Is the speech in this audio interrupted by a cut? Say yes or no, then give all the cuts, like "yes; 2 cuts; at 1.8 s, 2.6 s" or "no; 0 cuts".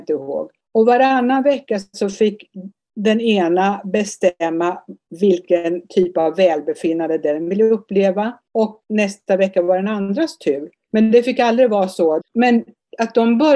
yes; 1 cut; at 12.2 s